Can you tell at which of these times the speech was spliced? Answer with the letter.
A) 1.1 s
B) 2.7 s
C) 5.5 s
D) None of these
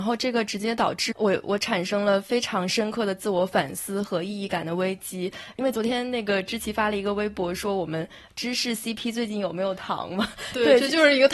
A